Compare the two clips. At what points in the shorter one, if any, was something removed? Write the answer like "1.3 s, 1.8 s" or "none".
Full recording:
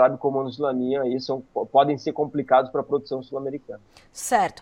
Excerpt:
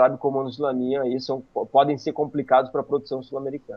none